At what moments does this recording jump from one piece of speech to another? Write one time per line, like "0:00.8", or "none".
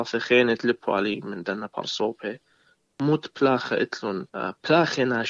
0:04.3